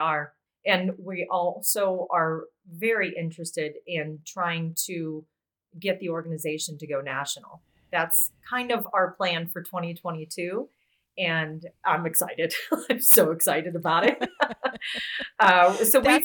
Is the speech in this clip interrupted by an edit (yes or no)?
no